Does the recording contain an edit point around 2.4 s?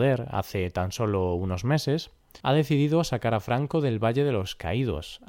yes; 1 cut; at 2.4 s

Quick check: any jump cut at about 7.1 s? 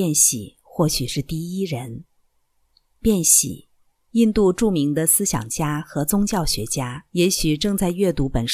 yes; 1 cut; at 7.1 s

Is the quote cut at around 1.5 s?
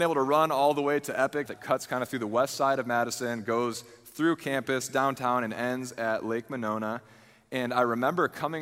yes; 1 cut; at 1.5 s

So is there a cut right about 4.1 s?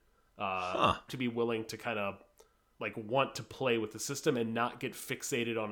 no; 2 cuts; at 1.1 s, 2.7 s

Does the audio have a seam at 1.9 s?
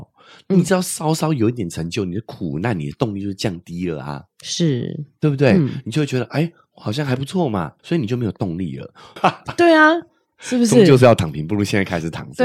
no; 2 cuts; at 7.8 s, 9.2 s

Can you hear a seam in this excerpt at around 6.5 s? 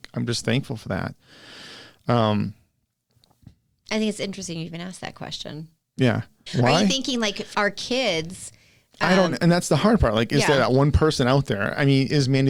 yes; 2 cuts; at 6.5 s, 7.5 s

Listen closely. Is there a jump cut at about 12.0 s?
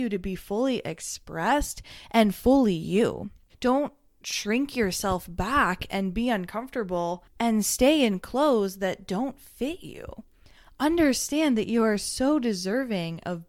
no; 1 cut; at 3.5 s

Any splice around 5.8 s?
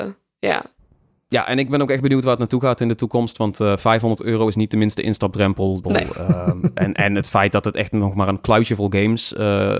yes; 1 cut; at 5.8 s

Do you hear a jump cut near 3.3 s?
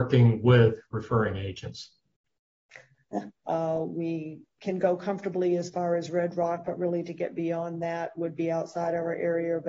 yes; 1 cut; at 3.3 s

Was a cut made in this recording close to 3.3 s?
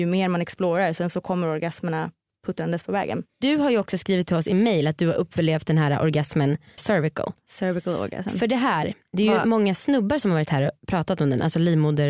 yes; 2 cuts; at 3.3 s, 6.8 s

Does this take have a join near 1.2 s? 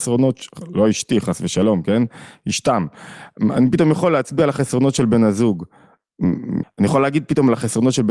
no; 1 cut; at 6.6 s

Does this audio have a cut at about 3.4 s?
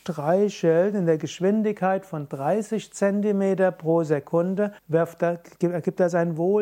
no; 1 cut; at 4.8 s

